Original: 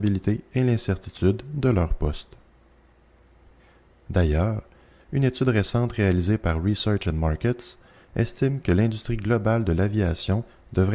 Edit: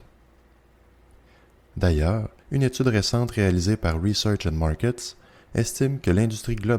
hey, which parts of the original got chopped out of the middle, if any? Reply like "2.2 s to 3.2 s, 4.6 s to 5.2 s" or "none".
4.7 s to 5.0 s